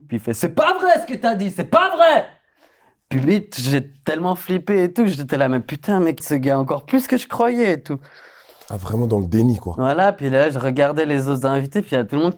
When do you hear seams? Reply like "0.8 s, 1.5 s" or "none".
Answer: 6.2 s